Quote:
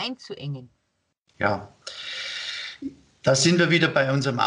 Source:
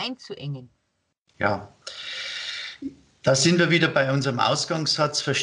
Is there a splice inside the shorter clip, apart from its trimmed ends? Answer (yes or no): no